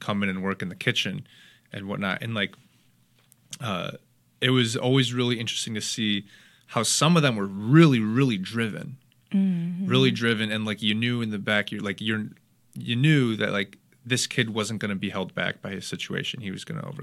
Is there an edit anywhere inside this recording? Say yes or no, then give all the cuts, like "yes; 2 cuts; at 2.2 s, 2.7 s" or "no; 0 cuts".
no; 0 cuts